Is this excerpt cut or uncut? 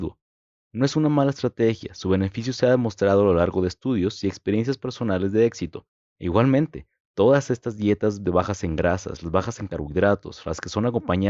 cut